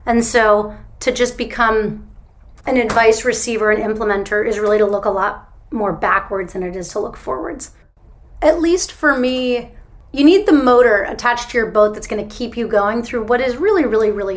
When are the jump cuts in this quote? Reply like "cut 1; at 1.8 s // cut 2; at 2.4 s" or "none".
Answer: none